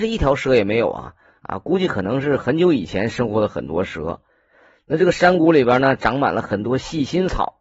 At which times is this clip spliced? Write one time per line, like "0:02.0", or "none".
none